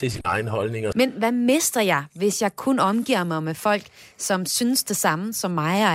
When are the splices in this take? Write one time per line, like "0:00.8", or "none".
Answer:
0:00.9